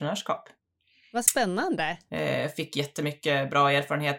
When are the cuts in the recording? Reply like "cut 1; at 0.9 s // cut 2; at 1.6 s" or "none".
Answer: cut 1; at 2.1 s